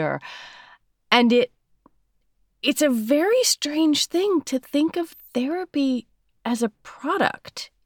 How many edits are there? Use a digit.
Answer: 0